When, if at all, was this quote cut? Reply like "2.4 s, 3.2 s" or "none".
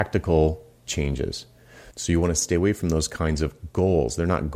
1.9 s